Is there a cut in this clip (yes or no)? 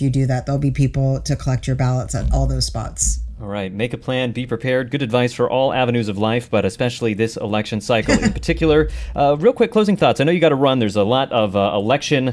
no